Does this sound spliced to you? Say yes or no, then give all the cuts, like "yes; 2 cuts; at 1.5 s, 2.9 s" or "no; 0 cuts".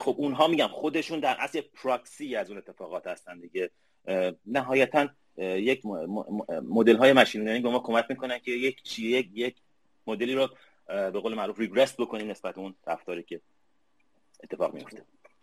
no; 0 cuts